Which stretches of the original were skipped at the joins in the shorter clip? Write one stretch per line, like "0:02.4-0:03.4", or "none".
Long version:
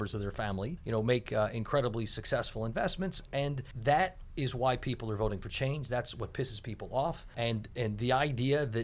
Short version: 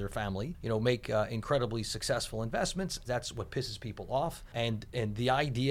0:03.3-0:05.9